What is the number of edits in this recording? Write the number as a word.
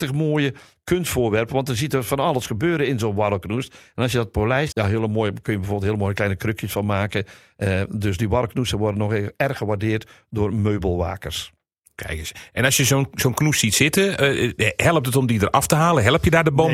one